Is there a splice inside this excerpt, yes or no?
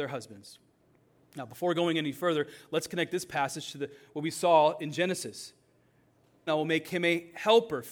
yes